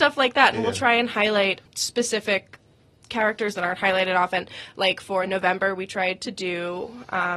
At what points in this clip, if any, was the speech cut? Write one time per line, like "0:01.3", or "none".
0:01.7